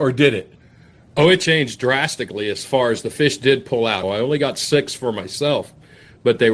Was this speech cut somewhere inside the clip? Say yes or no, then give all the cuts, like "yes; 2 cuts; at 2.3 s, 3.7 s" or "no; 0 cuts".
yes; 1 cut; at 4.0 s